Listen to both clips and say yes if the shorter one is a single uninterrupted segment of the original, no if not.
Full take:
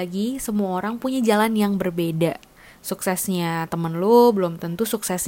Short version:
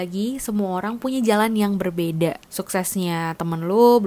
no